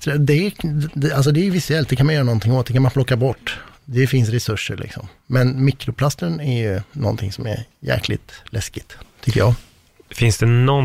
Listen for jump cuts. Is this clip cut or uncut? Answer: uncut